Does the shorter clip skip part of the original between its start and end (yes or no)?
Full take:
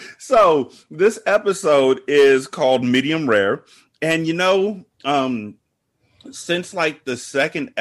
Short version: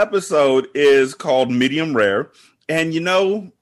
no